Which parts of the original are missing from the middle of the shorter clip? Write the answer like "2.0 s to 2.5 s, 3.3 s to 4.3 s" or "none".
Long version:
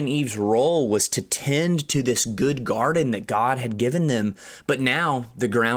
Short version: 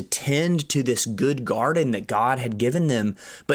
none